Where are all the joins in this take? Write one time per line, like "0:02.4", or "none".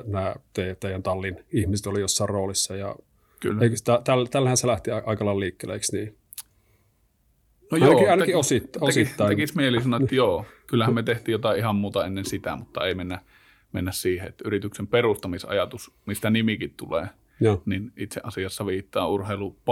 none